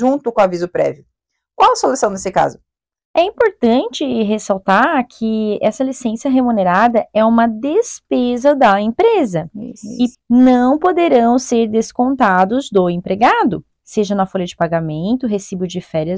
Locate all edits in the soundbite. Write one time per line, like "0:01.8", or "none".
0:03.0
0:10.2